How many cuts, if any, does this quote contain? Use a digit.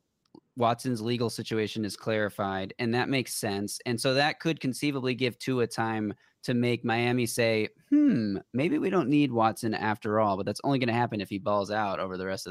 0